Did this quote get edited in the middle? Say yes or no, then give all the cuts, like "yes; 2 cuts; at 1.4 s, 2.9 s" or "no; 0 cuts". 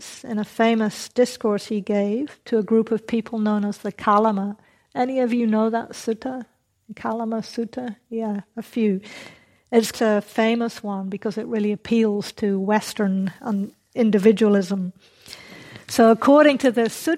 yes; 1 cut; at 9.9 s